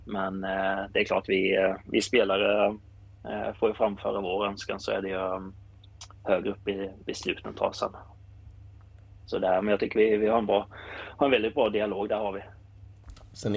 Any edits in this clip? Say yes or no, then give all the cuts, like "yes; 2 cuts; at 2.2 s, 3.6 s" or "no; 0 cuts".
no; 0 cuts